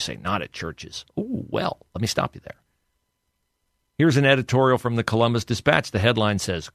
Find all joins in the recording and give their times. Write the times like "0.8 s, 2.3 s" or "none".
none